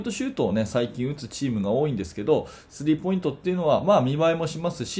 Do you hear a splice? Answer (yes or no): no